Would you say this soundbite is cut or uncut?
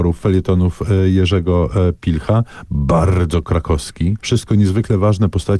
cut